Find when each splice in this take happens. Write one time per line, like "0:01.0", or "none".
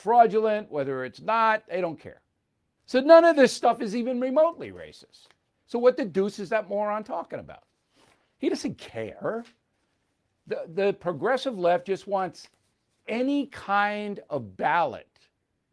0:02.8